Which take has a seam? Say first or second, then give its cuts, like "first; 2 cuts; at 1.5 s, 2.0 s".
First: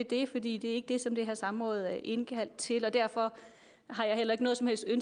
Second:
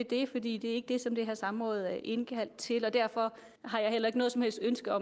second; 1 cut; at 3.6 s